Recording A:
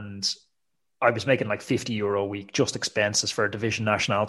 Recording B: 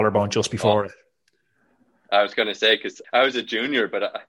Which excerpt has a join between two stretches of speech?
B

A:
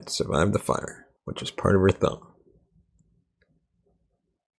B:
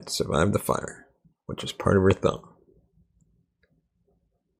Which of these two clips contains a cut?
A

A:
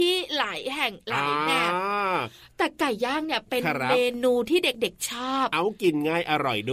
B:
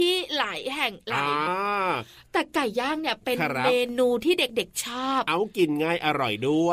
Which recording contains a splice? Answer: B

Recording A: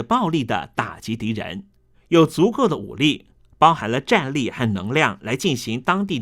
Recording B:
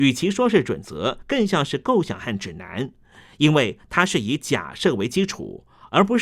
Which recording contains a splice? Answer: A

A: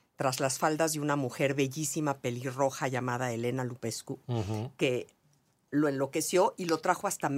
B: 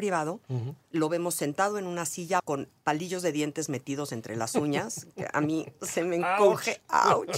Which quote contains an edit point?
B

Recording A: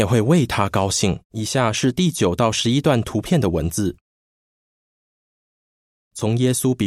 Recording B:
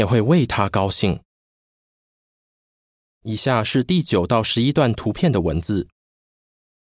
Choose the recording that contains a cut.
A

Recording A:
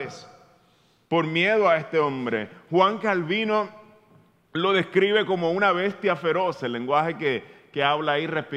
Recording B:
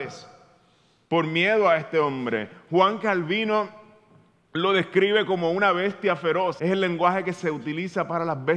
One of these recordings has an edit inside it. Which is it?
B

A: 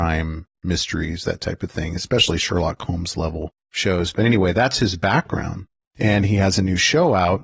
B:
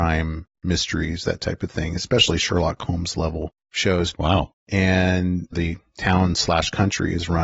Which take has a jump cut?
B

